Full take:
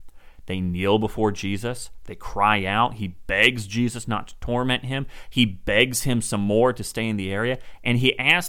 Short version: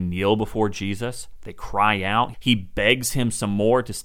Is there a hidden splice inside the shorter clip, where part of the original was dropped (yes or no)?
yes